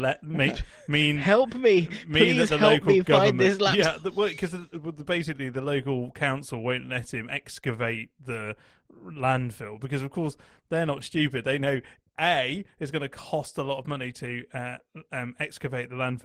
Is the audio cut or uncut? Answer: uncut